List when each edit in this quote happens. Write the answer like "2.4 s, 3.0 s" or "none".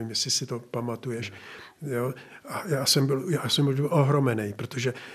none